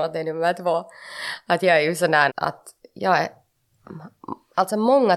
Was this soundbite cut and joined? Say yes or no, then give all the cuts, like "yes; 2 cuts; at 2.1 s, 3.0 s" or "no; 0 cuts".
yes; 1 cut; at 2.3 s